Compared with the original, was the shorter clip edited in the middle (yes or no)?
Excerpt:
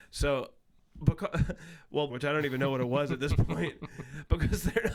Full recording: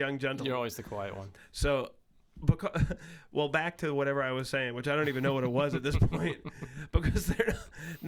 yes